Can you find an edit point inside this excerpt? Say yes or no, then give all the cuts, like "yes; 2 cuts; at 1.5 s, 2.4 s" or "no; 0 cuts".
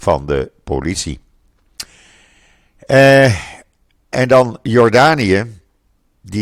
yes; 1 cut; at 4.1 s